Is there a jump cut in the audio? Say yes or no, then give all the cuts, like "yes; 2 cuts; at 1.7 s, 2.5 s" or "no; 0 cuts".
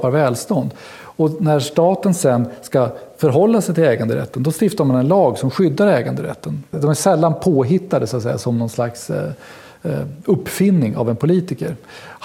yes; 1 cut; at 6.7 s